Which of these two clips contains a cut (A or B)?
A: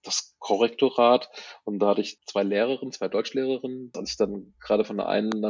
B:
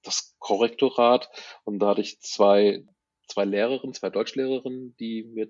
A